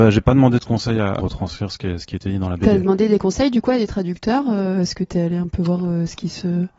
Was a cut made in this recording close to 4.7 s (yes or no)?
no